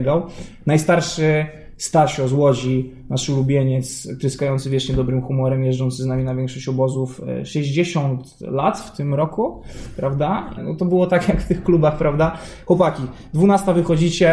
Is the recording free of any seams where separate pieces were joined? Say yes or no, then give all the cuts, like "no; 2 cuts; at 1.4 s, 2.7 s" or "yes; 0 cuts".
no; 1 cut; at 10.6 s